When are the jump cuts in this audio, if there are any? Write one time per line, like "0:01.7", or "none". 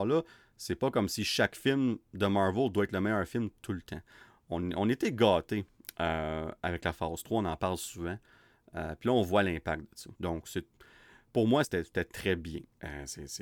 0:10.2
0:11.6